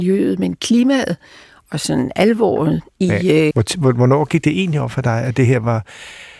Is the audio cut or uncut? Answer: cut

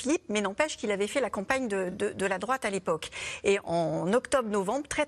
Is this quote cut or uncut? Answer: uncut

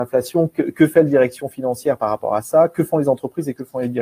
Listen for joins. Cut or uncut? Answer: uncut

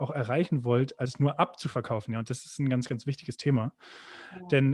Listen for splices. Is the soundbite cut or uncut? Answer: uncut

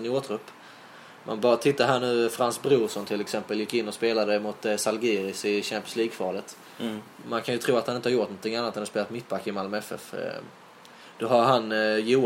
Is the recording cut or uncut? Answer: uncut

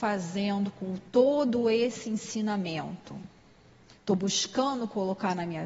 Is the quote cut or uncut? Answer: uncut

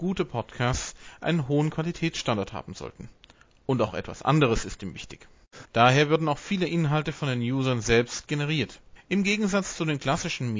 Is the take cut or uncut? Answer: cut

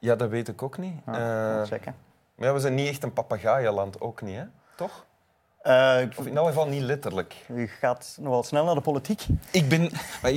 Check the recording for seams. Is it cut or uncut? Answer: uncut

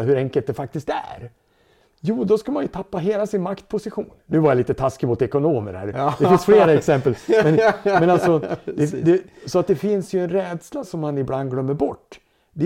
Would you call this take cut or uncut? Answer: uncut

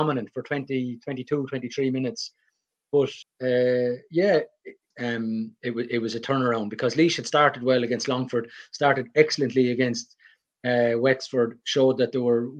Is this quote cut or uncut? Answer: cut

